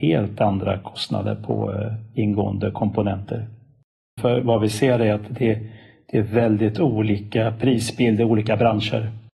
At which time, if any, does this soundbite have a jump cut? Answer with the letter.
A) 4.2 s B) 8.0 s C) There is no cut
A